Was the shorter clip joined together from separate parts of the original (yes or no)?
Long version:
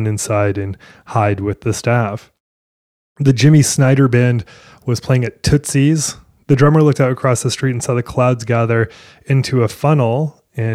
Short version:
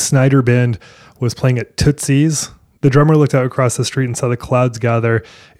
no